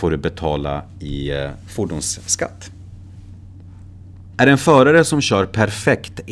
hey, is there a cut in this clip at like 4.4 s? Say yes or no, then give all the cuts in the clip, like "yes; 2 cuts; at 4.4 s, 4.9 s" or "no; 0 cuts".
yes; 1 cut; at 4.4 s